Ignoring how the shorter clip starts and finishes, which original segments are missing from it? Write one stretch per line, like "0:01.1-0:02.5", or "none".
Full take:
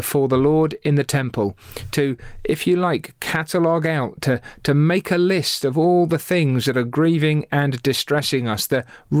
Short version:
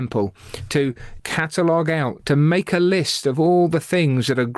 0:02.4-0:03.2
0:04.2-0:04.6